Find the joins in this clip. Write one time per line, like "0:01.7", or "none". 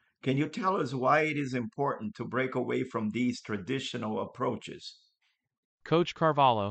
none